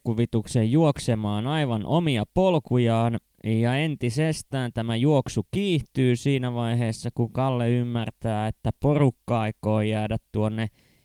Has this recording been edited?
no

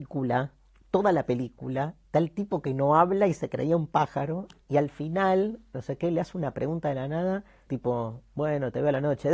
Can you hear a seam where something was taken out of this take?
yes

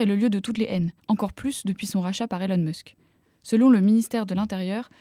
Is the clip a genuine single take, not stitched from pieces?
no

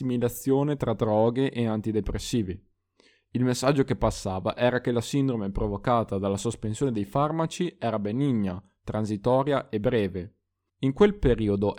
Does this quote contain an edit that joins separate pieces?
yes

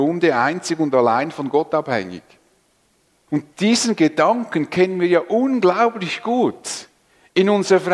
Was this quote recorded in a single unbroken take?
no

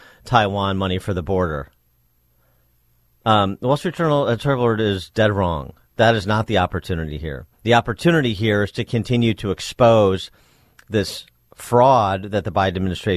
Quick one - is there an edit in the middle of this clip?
yes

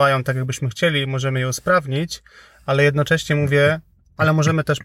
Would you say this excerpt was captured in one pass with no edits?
yes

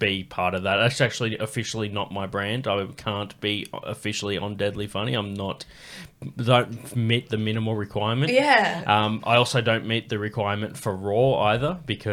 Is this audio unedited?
yes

